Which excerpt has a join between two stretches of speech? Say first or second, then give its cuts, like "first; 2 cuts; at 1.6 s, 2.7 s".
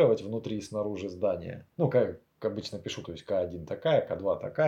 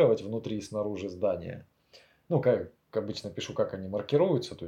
first; 2 cuts; at 1.7 s, 3.0 s